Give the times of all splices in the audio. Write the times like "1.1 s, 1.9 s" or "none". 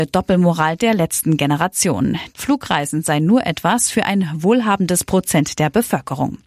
2.3 s

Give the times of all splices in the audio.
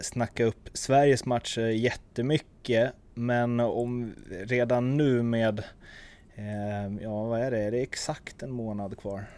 none

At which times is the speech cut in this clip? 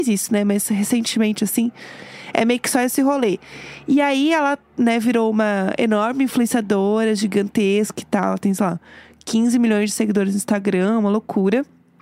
none

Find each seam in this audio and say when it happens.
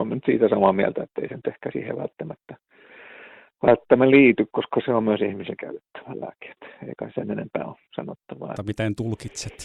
7.1 s, 8.6 s

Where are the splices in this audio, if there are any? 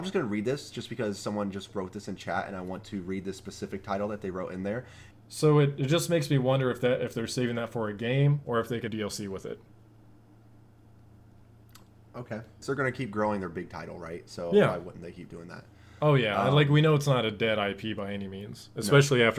5.1 s, 8.9 s, 12.6 s

